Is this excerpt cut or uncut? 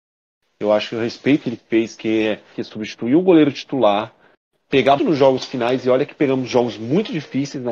cut